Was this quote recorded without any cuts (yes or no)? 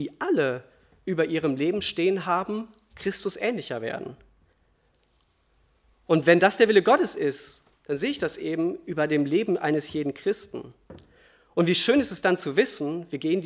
yes